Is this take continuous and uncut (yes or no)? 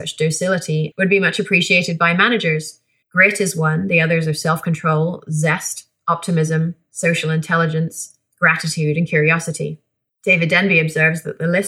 no